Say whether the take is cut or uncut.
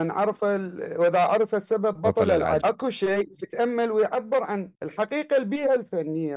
cut